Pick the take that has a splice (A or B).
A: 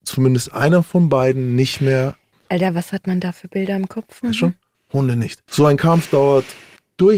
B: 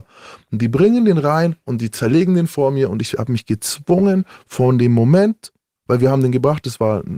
A